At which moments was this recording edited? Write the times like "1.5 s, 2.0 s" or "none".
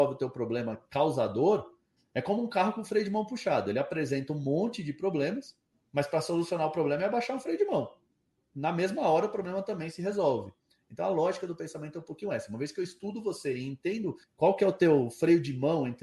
none